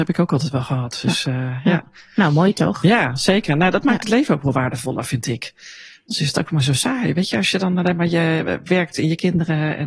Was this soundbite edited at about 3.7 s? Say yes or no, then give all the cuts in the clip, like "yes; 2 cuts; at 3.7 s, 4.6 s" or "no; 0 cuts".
no; 0 cuts